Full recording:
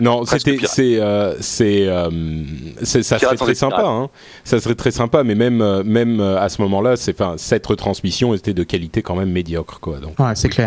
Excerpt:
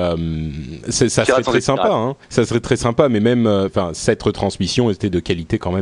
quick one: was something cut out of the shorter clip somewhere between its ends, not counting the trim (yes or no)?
yes